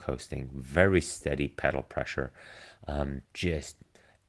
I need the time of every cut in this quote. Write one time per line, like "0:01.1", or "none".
0:03.2